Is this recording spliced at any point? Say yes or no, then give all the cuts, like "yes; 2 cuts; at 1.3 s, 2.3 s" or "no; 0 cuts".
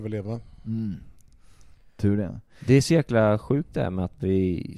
no; 0 cuts